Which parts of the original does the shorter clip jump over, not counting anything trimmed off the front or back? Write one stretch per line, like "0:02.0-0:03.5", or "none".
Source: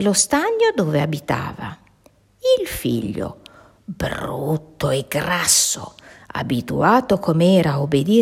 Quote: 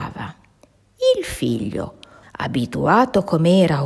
0:03.7-0:06.2